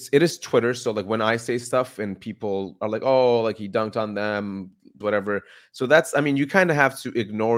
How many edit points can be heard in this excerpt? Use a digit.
1